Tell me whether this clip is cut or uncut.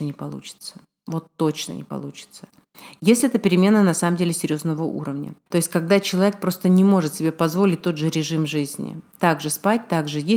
cut